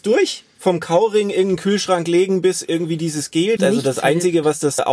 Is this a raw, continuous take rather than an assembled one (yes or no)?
no